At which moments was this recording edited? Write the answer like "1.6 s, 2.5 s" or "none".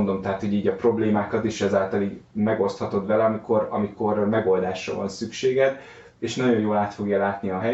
none